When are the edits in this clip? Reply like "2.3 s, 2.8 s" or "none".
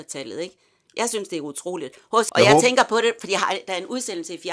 2.3 s